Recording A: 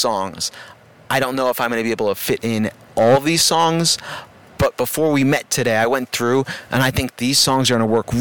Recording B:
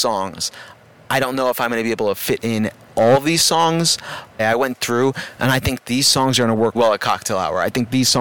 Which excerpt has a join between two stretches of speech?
B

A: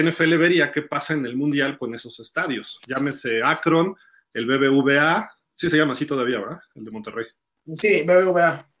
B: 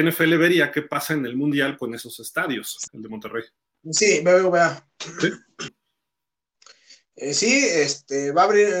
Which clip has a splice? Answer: B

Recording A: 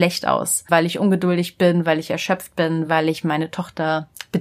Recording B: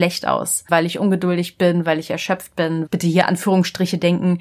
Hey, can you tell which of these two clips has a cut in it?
B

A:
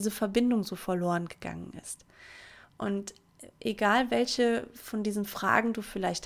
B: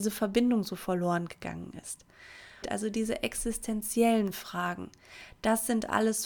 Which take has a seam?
B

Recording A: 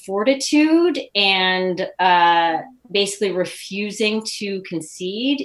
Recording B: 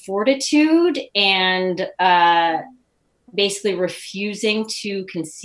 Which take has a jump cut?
A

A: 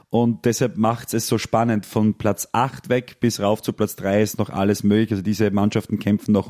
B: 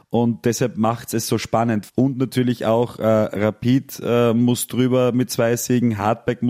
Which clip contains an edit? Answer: B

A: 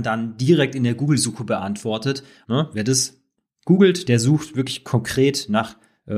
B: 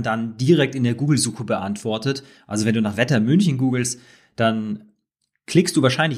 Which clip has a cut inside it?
A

